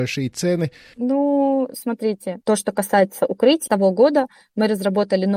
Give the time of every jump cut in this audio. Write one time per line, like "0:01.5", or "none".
0:00.9
0:02.4
0:03.7